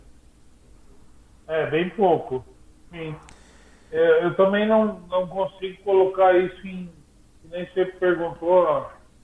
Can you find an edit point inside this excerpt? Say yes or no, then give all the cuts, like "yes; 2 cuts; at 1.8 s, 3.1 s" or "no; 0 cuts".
yes; 1 cut; at 2.9 s